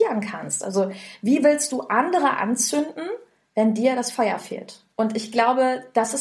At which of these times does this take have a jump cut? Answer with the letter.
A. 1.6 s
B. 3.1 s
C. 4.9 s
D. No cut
C